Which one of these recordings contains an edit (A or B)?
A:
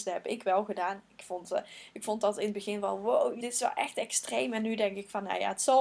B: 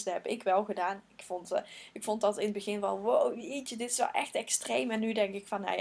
A